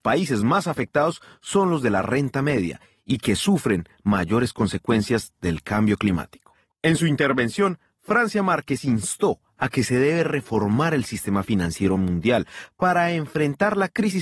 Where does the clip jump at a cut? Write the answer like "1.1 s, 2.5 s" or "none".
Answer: 6.7 s